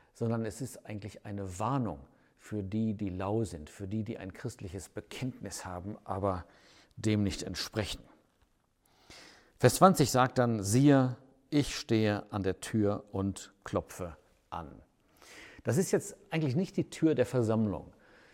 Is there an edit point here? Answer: no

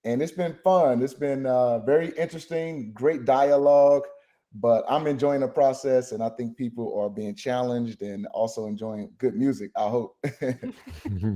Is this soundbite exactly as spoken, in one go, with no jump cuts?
yes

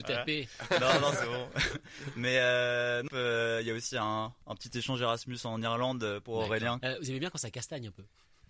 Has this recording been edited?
yes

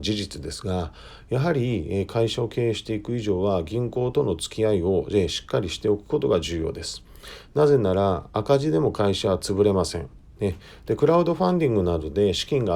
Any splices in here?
yes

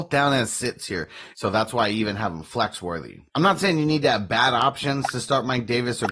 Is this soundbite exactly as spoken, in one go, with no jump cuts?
no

